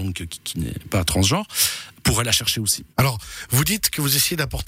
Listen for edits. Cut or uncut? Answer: cut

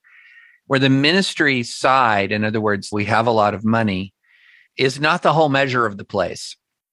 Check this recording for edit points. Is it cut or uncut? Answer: cut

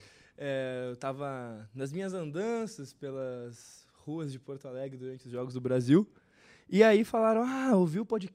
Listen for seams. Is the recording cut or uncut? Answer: uncut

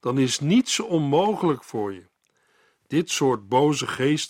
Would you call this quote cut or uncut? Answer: uncut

